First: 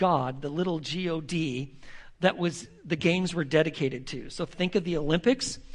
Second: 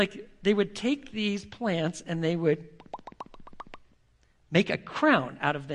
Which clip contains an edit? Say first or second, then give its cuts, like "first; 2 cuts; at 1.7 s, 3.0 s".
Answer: first; 1 cut; at 4.5 s